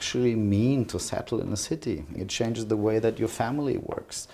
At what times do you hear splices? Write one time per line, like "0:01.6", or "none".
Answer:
0:02.2